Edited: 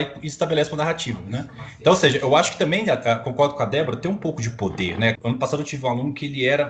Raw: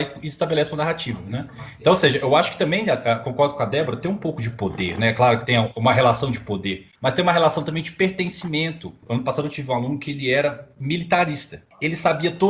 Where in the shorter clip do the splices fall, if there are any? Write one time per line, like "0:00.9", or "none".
0:05.2